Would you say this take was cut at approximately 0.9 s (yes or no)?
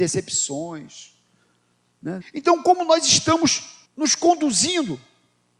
no